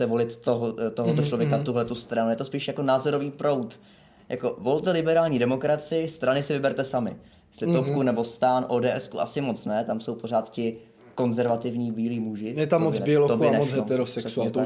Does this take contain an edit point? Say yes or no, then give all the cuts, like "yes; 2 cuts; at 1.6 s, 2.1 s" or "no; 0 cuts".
no; 0 cuts